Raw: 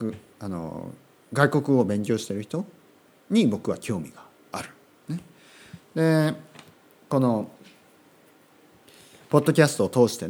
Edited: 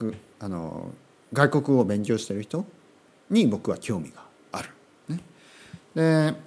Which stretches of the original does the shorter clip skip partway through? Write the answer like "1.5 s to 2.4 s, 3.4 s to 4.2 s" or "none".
none